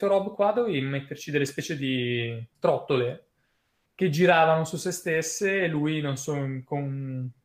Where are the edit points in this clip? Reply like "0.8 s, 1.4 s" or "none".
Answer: 2.5 s